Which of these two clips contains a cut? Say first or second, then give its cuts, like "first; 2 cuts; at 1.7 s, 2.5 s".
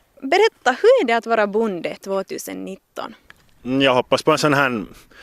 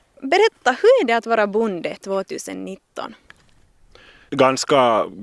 first; 1 cut; at 3.6 s